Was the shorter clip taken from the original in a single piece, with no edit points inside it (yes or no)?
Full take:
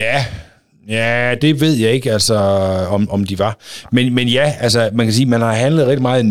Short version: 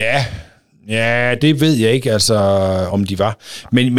no